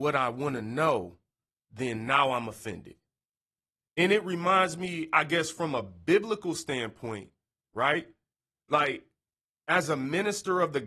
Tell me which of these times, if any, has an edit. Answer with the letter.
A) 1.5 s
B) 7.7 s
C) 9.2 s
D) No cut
B